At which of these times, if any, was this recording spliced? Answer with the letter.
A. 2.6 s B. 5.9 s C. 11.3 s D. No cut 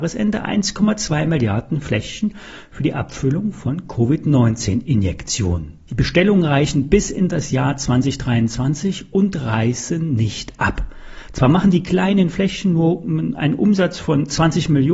B